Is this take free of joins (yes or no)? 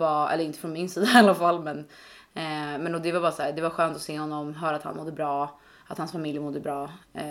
yes